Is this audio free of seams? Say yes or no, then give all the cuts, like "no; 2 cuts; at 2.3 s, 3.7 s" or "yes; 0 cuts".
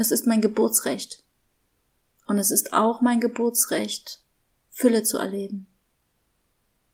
yes; 0 cuts